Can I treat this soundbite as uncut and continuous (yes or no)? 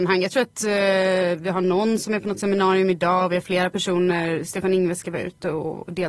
yes